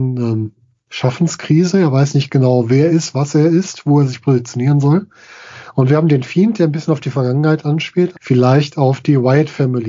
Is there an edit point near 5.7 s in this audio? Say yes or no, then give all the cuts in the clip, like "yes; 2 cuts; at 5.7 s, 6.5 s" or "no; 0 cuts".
no; 2 cuts; at 2.9 s, 8.1 s